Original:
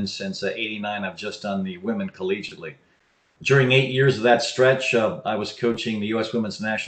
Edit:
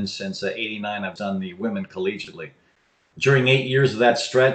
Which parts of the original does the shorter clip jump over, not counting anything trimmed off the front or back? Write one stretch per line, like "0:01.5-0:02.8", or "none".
0:01.2-0:01.4